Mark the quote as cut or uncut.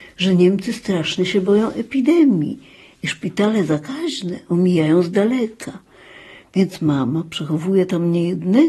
uncut